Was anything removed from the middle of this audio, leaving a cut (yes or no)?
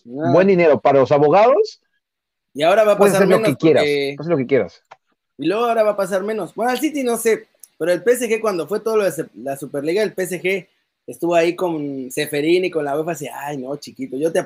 no